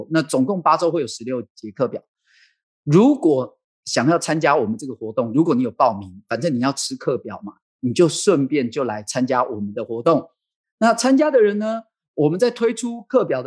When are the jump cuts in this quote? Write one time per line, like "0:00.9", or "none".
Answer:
none